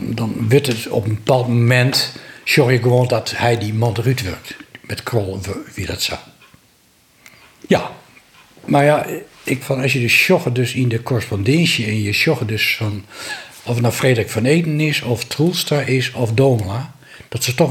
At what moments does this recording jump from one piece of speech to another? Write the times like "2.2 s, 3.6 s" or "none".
7.7 s, 9.6 s